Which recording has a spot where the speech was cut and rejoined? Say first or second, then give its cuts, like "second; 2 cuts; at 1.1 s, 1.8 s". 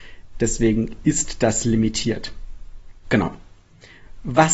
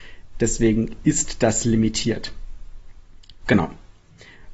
first; 1 cut; at 3.0 s